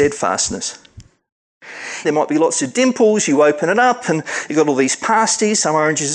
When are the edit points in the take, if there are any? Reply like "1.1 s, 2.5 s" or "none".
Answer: 2.0 s